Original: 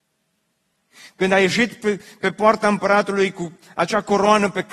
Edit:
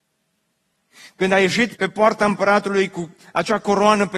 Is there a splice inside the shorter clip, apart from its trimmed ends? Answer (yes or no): yes